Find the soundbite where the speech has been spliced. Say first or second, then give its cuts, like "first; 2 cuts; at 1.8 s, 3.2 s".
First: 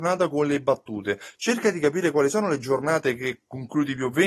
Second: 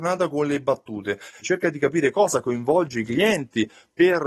second; 1 cut; at 1.3 s